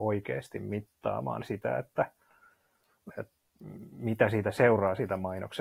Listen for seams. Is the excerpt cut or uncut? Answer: cut